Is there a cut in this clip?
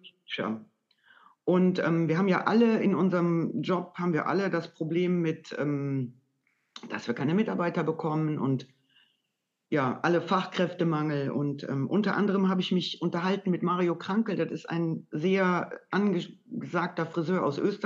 no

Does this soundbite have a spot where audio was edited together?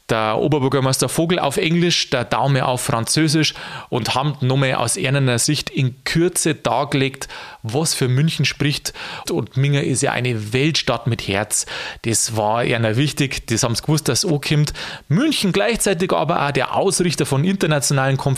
yes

